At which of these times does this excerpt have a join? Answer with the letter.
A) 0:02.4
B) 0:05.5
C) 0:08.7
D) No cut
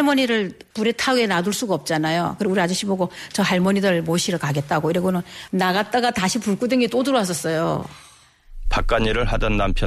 C